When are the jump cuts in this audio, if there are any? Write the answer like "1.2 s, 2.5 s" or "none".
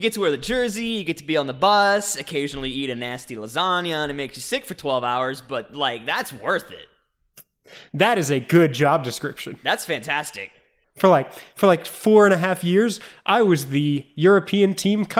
10.8 s